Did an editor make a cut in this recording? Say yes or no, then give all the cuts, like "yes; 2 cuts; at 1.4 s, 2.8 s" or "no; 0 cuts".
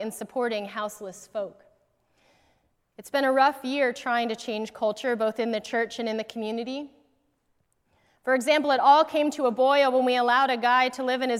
no; 0 cuts